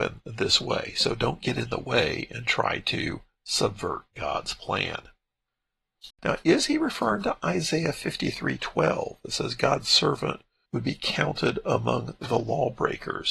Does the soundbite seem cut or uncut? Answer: cut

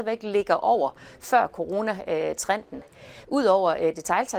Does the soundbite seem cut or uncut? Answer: cut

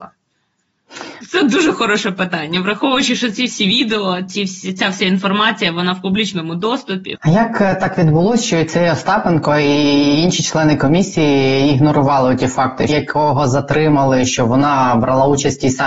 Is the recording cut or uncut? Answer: cut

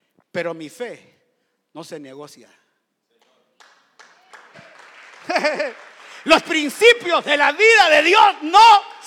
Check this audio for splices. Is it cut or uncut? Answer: cut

